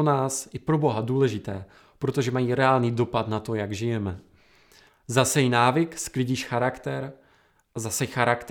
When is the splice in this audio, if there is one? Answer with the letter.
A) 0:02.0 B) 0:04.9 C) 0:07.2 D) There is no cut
B